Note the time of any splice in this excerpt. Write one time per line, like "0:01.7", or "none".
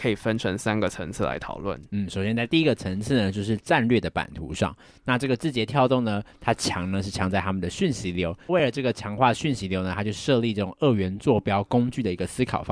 0:04.9
0:08.5